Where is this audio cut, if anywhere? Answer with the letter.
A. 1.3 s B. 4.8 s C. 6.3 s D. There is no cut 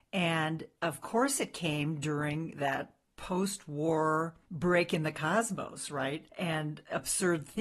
C